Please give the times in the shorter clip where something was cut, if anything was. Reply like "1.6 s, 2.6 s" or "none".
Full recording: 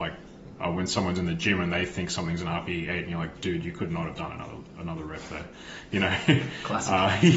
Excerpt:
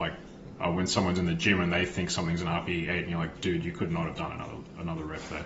none